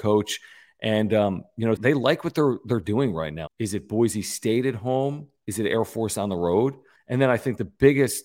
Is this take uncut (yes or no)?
no